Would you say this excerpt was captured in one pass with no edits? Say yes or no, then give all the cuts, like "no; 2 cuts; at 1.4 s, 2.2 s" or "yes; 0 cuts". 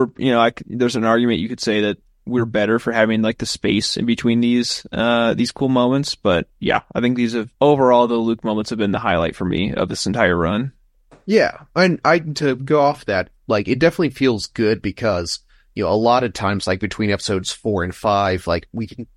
no; 1 cut; at 7.5 s